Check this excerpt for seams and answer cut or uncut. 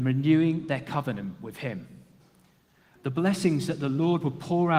cut